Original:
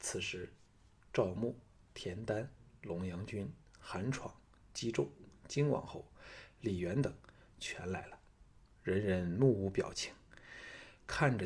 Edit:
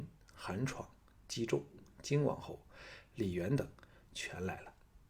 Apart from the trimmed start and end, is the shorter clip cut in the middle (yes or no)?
no